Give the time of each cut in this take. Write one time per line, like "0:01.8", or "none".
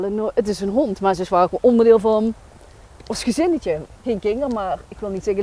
none